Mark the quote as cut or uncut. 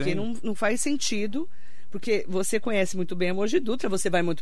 uncut